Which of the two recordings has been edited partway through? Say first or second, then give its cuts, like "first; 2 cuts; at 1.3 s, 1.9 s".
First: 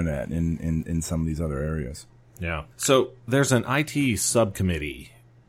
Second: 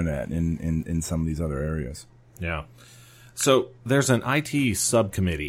first; 1 cut; at 2.7 s